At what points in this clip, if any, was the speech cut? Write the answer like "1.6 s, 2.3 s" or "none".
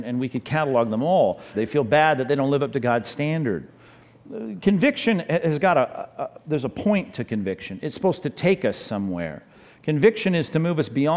1.5 s